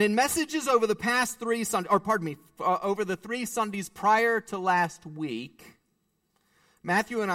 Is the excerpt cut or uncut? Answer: uncut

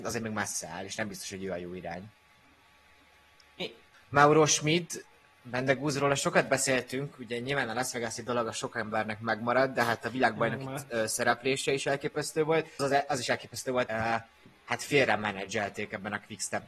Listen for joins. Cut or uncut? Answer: cut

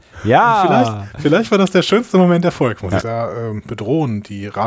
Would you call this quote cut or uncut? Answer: cut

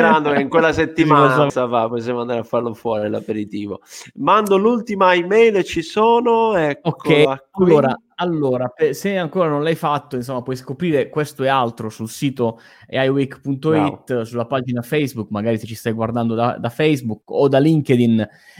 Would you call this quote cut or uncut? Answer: cut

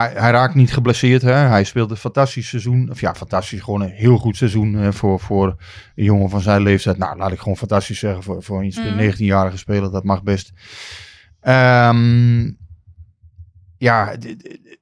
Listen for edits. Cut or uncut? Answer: uncut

